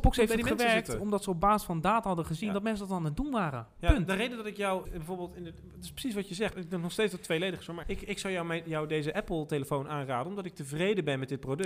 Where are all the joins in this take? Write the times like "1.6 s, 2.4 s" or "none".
4.8 s, 6.5 s, 7.8 s